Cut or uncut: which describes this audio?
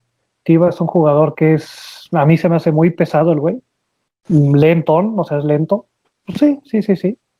cut